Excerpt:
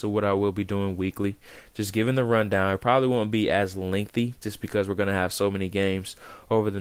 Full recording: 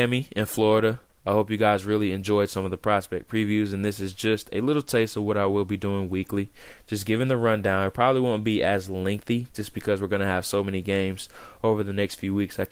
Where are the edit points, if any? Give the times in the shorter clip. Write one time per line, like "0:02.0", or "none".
none